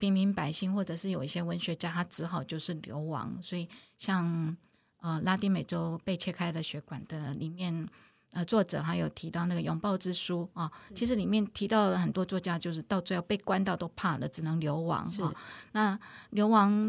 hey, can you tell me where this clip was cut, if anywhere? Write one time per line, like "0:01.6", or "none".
none

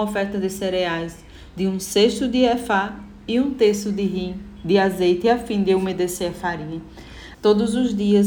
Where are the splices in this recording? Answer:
0:07.3

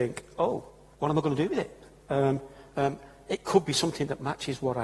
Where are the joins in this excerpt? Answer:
0:00.9

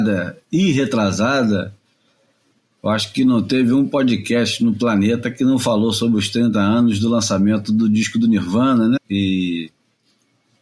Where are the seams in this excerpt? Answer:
0:09.0

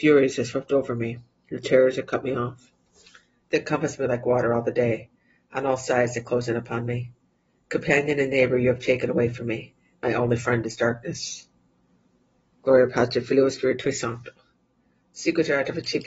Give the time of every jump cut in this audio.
none

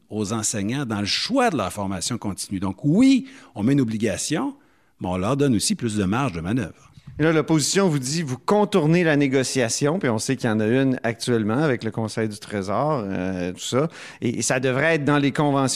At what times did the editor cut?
none

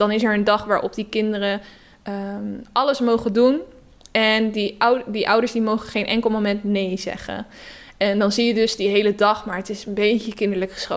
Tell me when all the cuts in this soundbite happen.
none

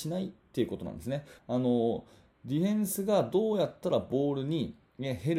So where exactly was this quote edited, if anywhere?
0:01.4

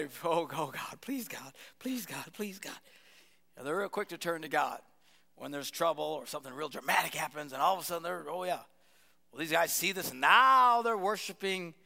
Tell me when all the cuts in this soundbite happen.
none

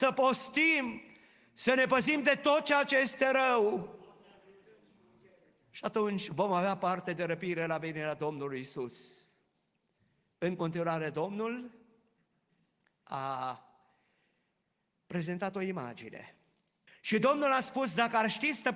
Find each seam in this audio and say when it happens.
0:16.9

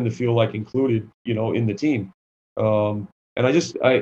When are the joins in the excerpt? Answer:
none

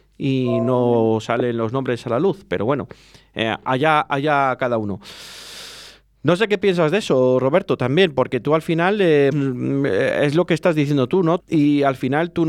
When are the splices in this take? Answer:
0:09.3
0:11.4

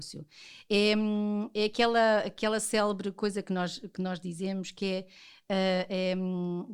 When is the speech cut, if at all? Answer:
none

